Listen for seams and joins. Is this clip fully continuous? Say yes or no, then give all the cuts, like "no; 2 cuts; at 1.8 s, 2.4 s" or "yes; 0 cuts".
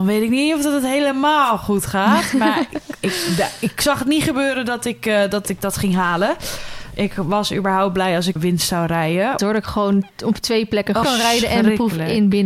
no; 3 cuts; at 8.4 s, 9.4 s, 11.0 s